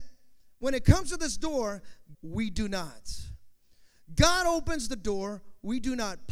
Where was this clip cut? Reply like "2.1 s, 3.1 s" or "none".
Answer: 2.1 s